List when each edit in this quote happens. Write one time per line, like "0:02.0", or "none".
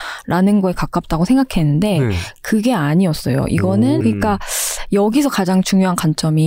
0:04.0